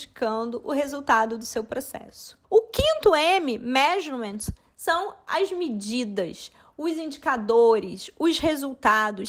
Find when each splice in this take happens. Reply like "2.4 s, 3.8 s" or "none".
2.4 s